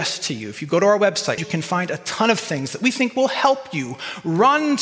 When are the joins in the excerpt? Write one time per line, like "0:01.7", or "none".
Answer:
0:01.4